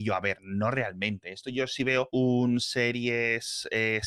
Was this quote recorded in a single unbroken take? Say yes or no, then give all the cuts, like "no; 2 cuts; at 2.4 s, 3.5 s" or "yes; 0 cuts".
yes; 0 cuts